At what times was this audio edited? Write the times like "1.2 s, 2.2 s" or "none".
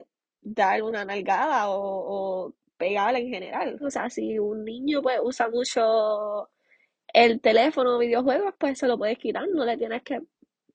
3.8 s